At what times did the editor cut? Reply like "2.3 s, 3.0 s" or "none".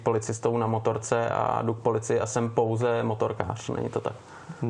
none